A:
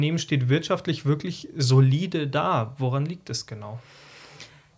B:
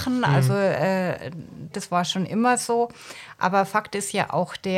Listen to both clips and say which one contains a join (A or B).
B